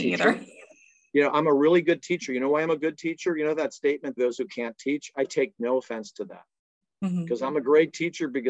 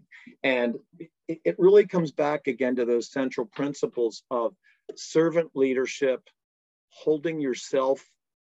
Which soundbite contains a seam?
first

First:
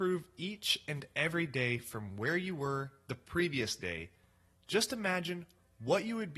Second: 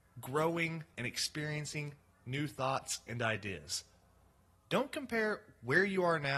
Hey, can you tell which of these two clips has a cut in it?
second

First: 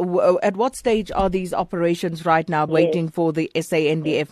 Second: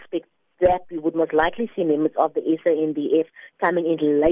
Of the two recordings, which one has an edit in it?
first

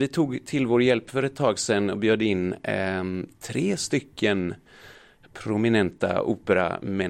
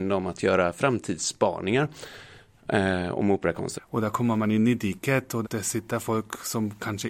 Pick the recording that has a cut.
second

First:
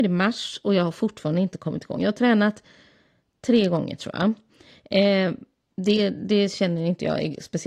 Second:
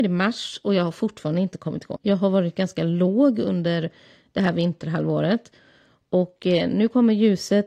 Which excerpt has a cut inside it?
second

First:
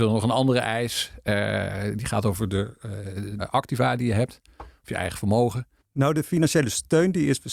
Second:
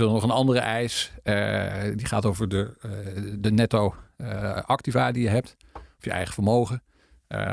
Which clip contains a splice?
first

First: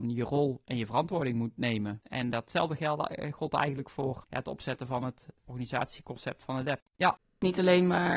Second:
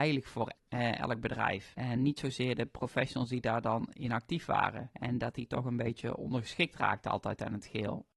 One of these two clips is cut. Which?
first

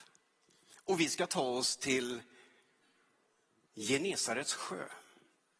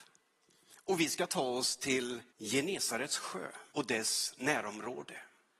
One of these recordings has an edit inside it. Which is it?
second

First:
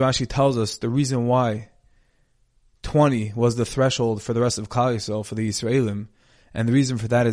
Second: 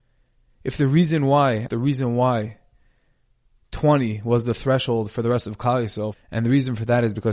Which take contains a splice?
second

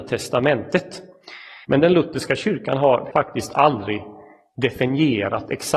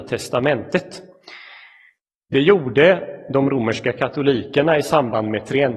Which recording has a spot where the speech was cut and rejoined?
first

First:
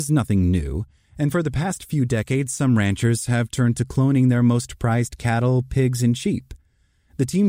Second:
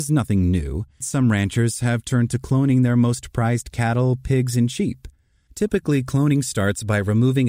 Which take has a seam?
second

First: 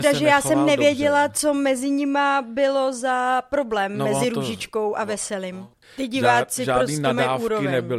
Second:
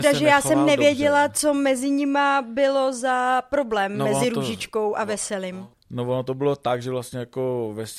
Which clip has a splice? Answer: first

